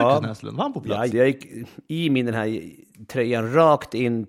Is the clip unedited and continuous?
no; 1 cut; at 1.1 s

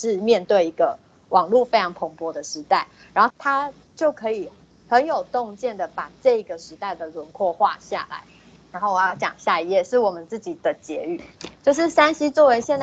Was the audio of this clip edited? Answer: yes; 2 cuts; at 3.3 s, 8.6 s

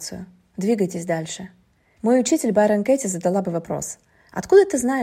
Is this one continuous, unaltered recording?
no; 1 cut; at 2.0 s

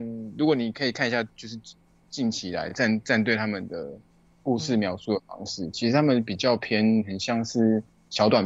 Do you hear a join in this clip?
no; 0 cuts

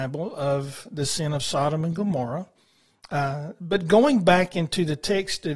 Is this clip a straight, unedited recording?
yes; 0 cuts

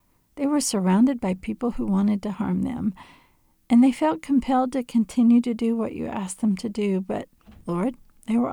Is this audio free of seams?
yes; 0 cuts

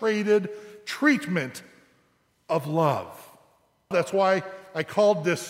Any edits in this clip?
yes; 1 cut; at 3.9 s

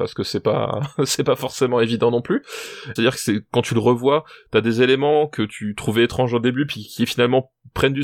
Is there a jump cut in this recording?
yes; 1 cut; at 3.0 s

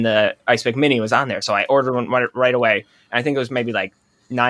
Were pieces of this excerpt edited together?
no; 0 cuts

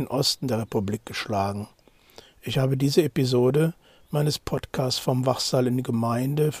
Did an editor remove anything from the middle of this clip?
no; 0 cuts

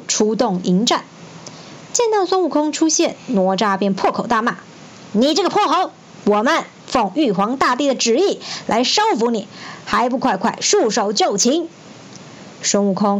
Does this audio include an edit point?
no; 0 cuts

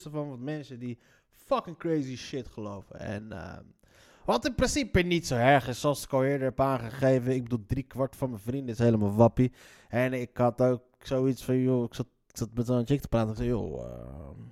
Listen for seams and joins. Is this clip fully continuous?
yes; 0 cuts

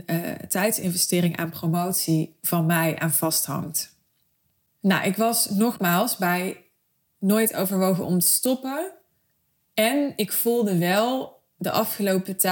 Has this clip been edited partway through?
no; 0 cuts

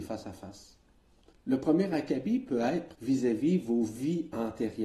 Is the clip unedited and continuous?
no; 2 cuts; at 1.3 s, 2.9 s

